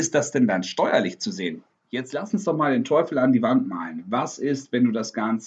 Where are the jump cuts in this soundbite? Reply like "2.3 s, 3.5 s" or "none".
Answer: 1.7 s